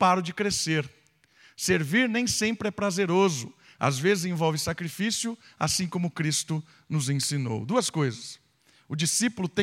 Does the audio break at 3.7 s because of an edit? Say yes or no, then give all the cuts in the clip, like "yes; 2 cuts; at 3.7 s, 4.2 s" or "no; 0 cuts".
no; 0 cuts